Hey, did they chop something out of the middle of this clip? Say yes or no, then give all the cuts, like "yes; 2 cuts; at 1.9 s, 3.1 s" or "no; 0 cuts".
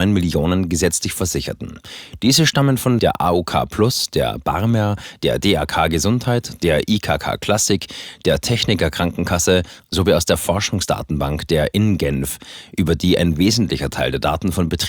no; 0 cuts